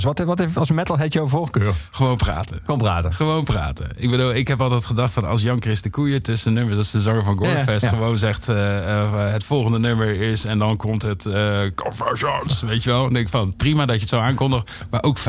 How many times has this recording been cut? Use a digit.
0